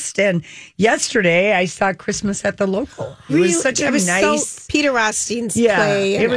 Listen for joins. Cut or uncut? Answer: cut